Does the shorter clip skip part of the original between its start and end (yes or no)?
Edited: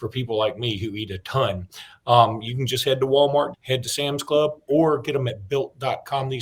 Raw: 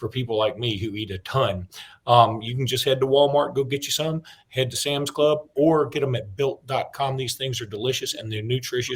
yes